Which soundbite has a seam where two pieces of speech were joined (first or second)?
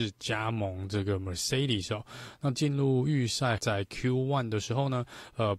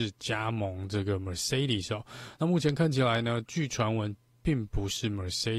first